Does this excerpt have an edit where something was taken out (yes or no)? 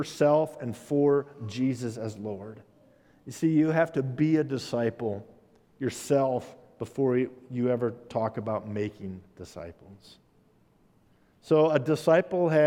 no